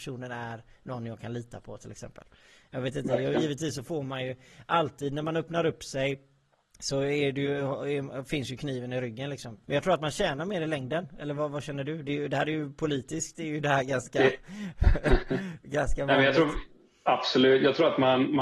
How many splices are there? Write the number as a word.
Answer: one